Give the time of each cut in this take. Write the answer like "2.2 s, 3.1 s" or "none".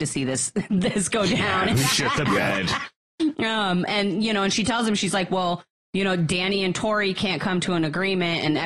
none